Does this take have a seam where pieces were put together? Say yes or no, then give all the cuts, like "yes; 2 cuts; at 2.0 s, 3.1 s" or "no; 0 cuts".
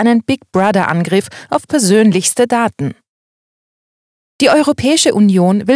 no; 0 cuts